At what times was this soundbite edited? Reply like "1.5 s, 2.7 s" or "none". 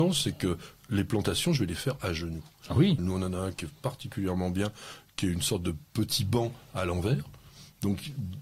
3.0 s